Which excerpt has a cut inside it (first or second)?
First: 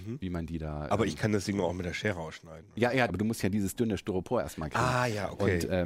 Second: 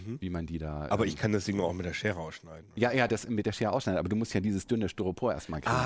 first